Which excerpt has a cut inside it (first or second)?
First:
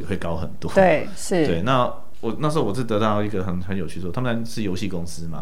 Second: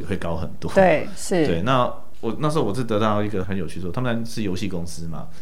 second